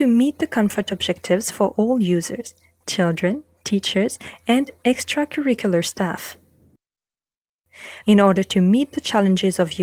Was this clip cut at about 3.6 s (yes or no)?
no